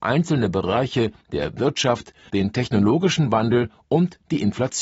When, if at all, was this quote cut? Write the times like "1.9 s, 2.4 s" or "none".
2.3 s